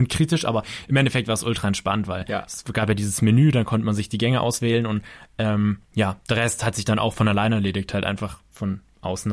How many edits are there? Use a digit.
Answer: 1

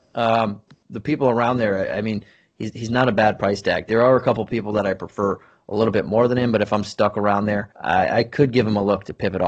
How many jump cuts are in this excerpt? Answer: 1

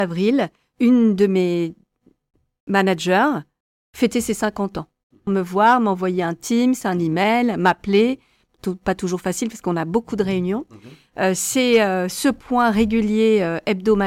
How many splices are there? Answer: 1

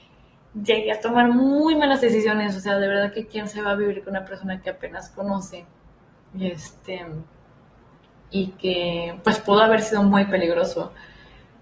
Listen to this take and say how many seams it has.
0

